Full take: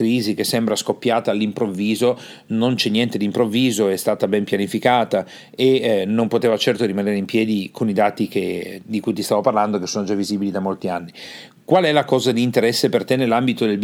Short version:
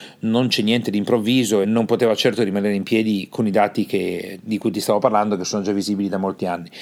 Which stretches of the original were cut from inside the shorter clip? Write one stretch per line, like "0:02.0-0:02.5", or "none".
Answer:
0:03.9-0:06.1